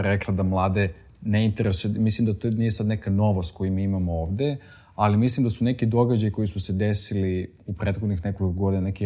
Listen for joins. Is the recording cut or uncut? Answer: uncut